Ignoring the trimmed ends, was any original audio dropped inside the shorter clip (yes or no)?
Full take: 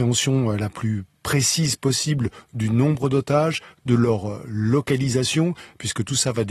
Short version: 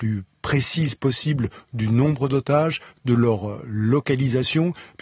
no